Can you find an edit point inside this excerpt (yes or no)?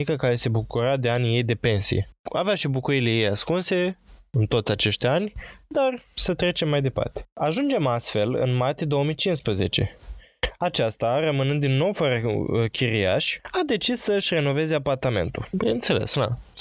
no